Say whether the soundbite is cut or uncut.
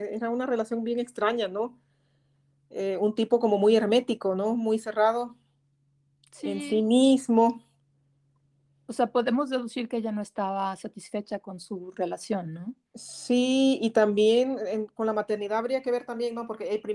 uncut